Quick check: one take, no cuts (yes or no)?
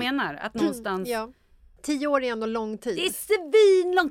yes